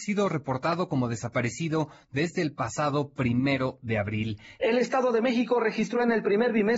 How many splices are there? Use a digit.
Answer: 1